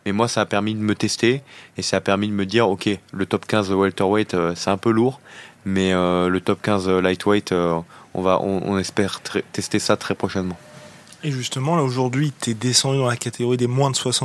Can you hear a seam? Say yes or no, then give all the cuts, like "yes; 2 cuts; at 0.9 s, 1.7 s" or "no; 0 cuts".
no; 0 cuts